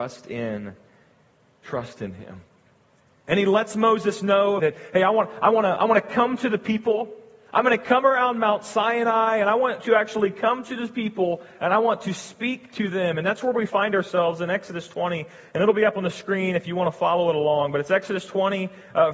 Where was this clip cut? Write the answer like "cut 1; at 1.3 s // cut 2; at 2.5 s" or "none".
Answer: cut 1; at 4.6 s